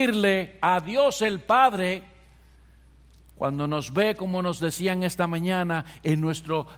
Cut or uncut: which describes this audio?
uncut